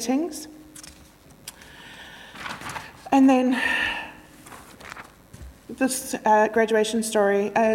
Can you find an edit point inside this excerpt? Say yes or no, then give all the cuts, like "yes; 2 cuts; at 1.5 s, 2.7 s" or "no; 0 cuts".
no; 0 cuts